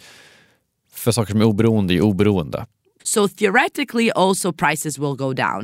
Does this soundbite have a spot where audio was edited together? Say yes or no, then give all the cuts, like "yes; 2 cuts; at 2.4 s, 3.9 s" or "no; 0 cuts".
yes; 1 cut; at 3.0 s